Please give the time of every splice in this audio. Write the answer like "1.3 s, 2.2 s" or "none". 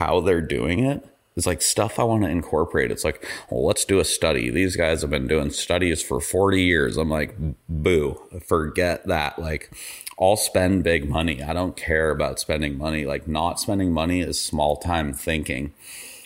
none